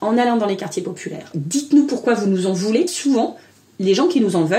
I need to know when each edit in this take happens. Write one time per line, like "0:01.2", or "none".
0:01.3
0:02.9